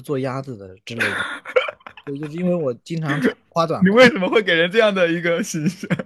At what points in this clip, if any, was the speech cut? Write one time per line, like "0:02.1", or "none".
none

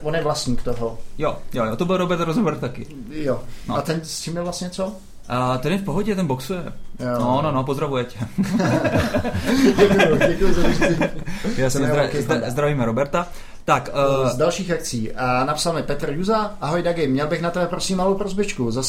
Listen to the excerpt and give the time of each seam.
none

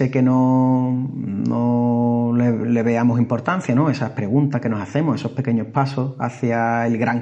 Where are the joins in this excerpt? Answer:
none

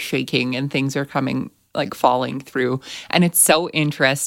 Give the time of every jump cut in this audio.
none

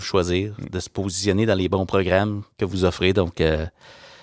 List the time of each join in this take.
0:02.5

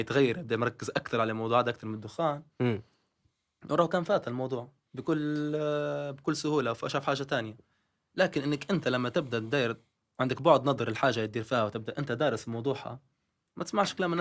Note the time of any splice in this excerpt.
none

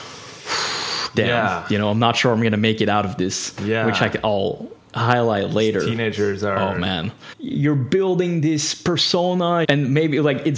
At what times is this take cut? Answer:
0:07.3
0:09.6

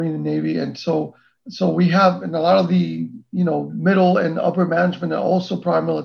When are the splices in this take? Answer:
none

